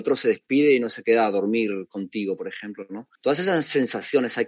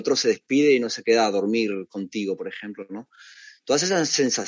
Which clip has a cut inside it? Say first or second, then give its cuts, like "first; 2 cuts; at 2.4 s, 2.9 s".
first; 1 cut; at 3.2 s